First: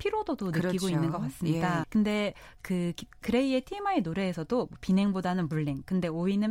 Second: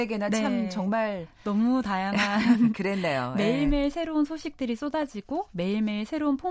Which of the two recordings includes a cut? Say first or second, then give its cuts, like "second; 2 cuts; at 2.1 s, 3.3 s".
first; 1 cut; at 1.8 s